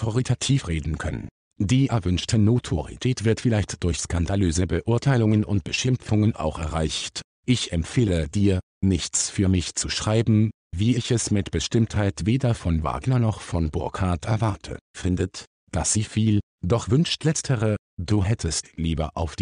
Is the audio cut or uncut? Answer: cut